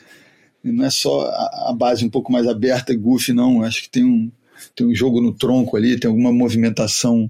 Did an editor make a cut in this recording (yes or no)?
no